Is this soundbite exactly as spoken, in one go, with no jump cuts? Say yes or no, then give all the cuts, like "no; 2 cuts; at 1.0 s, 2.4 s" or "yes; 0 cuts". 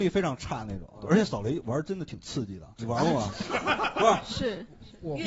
yes; 0 cuts